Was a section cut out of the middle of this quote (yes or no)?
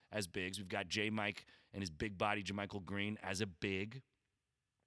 no